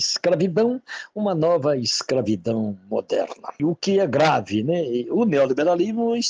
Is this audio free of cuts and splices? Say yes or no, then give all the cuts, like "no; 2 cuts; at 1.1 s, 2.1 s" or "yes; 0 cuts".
yes; 0 cuts